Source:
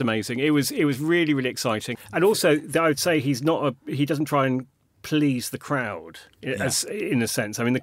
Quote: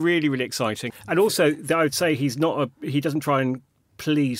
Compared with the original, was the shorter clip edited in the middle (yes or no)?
no